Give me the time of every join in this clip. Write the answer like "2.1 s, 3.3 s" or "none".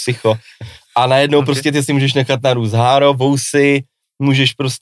none